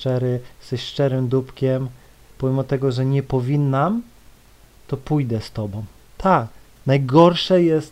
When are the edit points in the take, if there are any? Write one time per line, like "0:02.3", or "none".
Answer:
0:06.1